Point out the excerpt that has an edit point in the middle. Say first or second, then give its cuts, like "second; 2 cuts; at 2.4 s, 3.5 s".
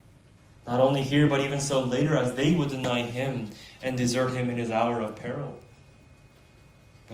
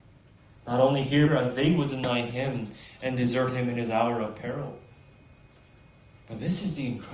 second; 1 cut; at 1.3 s